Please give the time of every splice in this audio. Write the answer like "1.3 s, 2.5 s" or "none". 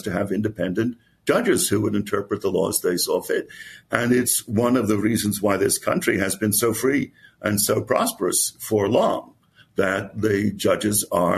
none